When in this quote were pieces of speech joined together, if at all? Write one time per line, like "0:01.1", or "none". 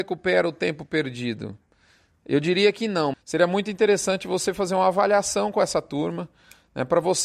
0:03.1